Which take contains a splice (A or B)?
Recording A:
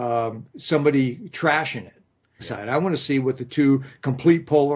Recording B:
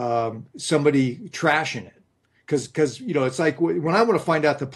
A